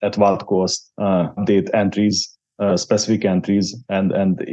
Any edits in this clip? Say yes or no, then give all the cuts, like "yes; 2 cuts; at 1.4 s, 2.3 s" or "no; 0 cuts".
yes; 1 cut; at 1.4 s